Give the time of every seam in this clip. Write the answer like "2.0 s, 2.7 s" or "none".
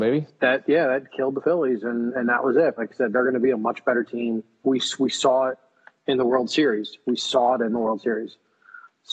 2.8 s, 4.6 s